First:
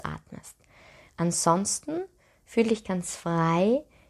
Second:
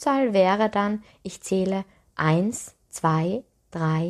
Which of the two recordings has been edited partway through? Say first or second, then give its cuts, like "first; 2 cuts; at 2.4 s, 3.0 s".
first; 1 cut; at 1.1 s